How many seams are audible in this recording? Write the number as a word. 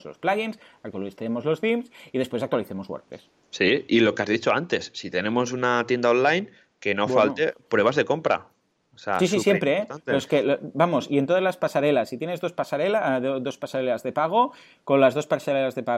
zero